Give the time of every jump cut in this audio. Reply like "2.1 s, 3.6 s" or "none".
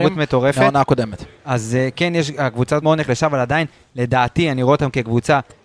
2.8 s